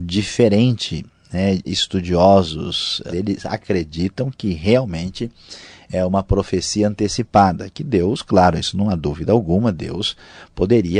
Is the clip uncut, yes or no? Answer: no